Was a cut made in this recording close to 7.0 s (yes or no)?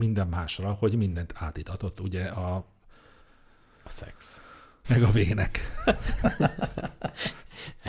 no